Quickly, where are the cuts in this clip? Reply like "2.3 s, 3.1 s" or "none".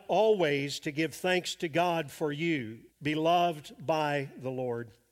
2.9 s